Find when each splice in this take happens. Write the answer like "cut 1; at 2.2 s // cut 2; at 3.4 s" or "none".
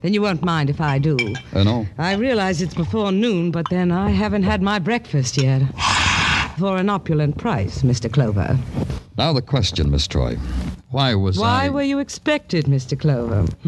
cut 1; at 6.6 s